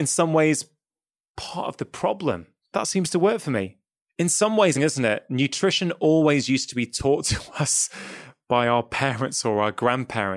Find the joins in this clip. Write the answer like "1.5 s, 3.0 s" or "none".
2.7 s, 4.7 s

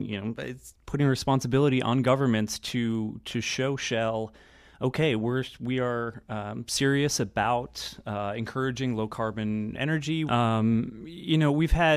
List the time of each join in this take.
10.3 s

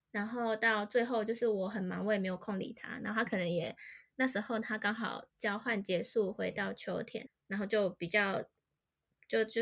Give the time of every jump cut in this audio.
7.3 s

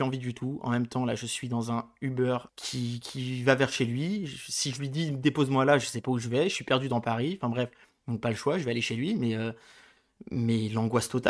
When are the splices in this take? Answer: 2.5 s

